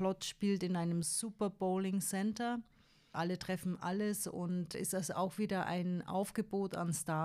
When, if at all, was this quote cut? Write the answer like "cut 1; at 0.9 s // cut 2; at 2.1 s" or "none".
none